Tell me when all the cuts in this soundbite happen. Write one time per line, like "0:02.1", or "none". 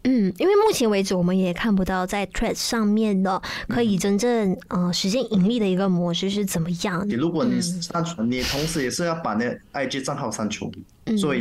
0:07.1
0:08.2